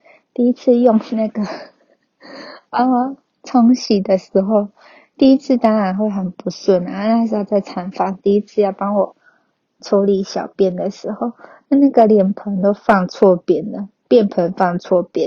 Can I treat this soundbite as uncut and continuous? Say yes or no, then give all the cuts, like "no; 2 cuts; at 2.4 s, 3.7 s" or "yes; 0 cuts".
yes; 0 cuts